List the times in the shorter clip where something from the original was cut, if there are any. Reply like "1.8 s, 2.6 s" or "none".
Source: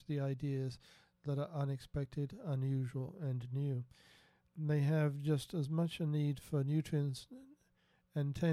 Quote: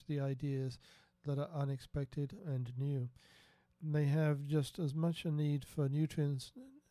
2.4 s